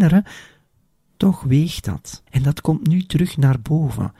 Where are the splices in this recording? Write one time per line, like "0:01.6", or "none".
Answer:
0:02.3